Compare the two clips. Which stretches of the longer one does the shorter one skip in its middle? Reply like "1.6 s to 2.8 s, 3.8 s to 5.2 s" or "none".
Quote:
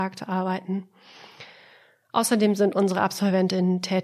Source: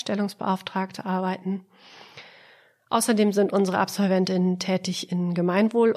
none